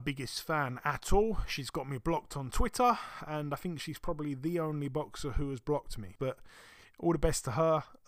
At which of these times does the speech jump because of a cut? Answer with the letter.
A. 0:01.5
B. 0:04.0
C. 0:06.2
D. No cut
C